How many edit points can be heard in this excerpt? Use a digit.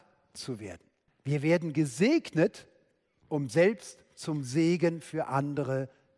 1